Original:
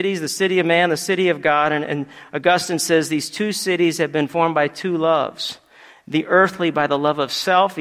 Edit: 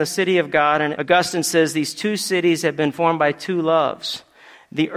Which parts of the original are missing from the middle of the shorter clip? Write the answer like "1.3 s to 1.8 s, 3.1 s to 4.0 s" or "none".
1.8 s to 2.3 s